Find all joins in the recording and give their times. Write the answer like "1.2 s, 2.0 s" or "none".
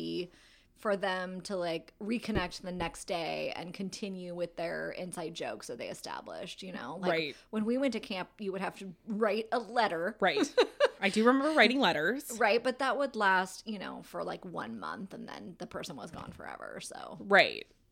none